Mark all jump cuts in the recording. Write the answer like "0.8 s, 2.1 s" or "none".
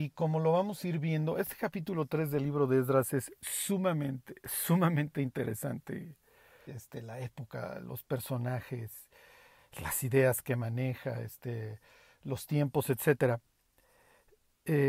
6.7 s